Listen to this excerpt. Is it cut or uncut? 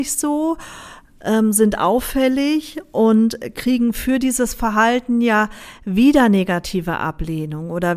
uncut